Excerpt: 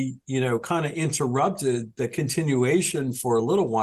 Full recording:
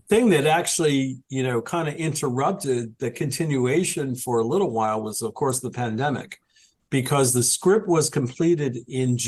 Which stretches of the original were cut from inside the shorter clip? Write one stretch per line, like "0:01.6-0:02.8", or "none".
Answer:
none